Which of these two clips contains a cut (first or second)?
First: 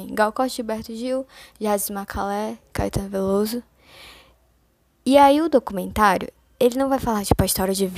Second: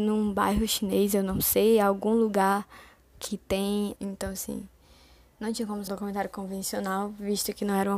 second